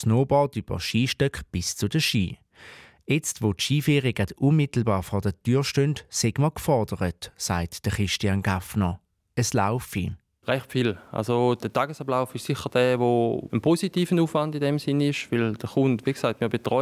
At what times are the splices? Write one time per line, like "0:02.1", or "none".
none